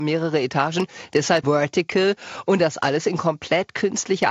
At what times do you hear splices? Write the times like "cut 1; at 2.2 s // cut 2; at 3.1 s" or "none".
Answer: cut 1; at 1.4 s